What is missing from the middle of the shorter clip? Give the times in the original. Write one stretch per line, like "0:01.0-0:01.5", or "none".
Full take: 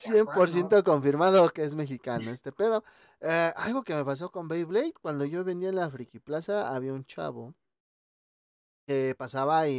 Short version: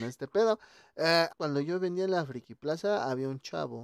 0:03.5-0:04.9